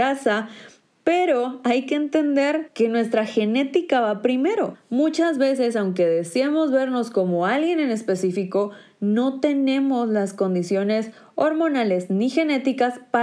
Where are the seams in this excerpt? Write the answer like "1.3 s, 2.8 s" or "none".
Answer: none